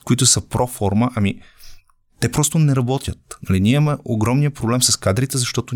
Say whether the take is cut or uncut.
uncut